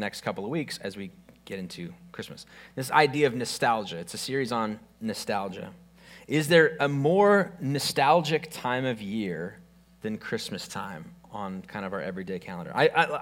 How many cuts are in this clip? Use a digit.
0